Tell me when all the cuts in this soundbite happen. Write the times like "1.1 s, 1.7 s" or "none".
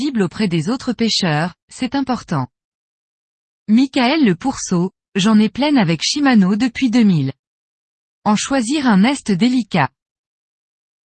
none